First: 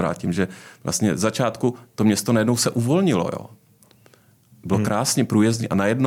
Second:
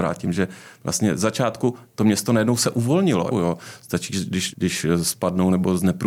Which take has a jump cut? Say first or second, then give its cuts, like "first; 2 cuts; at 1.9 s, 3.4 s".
second; 2 cuts; at 3.3 s, 4.5 s